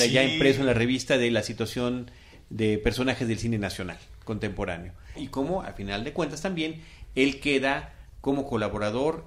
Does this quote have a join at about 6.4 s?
no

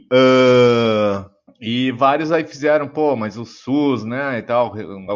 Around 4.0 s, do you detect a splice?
no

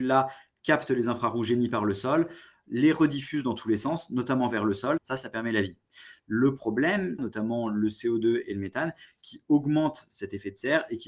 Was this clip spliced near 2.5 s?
no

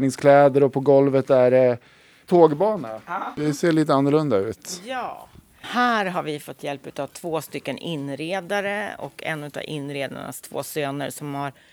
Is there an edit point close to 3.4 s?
yes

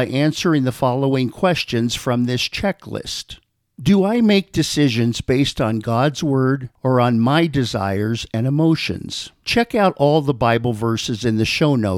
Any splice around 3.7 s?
no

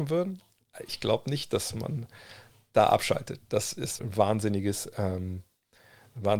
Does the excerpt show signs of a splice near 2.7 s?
no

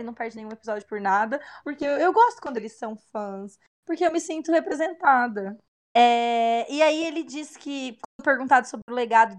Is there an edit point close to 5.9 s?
yes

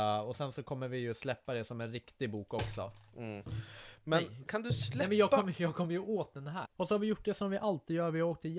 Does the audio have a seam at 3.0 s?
no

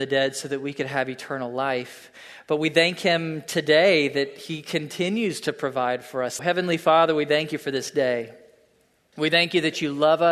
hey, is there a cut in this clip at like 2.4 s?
no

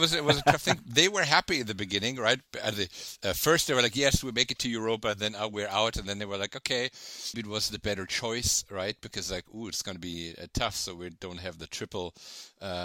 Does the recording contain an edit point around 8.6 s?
no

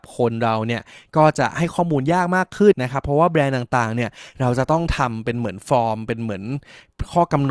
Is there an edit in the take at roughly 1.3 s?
no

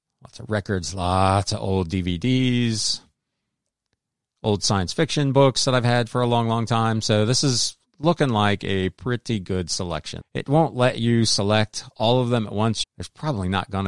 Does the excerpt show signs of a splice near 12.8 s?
yes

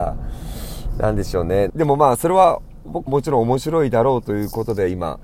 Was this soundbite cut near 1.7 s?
yes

